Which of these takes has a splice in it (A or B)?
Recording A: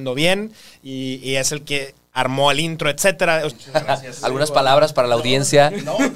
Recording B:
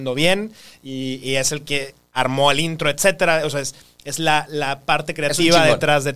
A